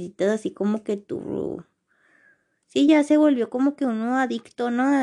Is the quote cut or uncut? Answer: uncut